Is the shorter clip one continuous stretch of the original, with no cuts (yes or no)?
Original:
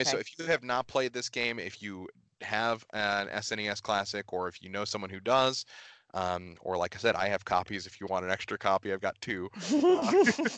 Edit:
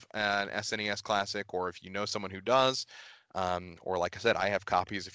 yes